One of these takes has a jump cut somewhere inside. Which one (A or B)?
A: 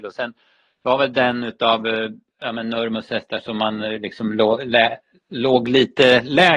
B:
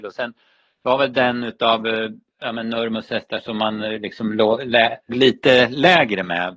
B